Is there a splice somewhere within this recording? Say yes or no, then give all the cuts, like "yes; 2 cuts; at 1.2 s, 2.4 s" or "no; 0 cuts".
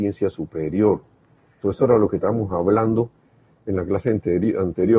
yes; 1 cut; at 1.6 s